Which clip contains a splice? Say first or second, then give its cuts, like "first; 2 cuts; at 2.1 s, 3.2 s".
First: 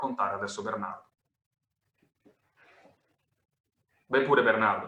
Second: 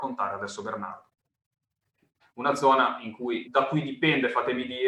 second; 2 cuts; at 2.2 s, 3.4 s